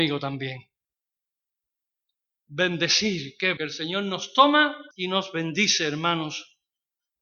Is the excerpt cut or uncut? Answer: cut